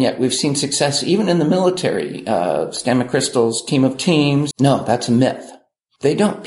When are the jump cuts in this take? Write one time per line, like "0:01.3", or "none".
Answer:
0:04.5

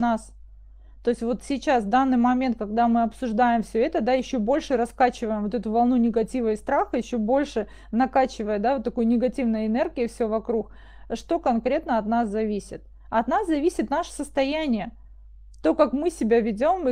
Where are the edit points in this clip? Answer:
none

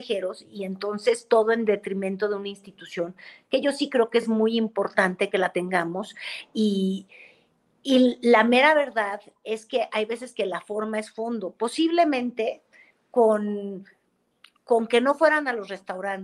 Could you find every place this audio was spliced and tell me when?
none

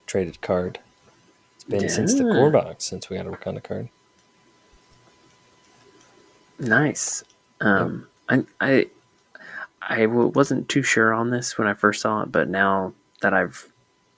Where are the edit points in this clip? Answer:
0:08.2

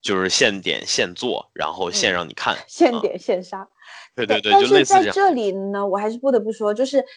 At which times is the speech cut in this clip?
none

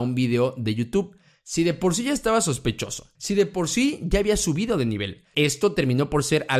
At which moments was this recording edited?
0:03.1
0:05.3

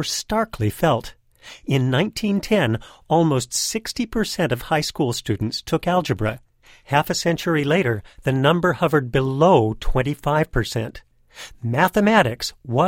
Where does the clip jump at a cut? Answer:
0:11.5

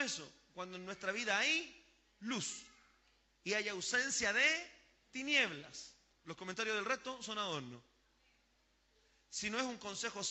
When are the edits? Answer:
0:06.1

